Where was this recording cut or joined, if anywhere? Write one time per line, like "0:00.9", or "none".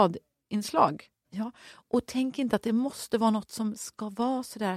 0:01.2